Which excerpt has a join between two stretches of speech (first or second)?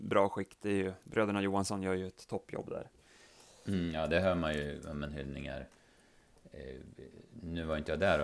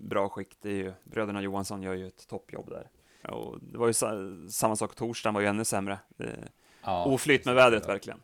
second